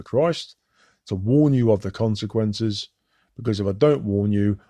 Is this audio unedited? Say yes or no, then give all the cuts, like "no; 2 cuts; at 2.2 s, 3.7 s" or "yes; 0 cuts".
yes; 0 cuts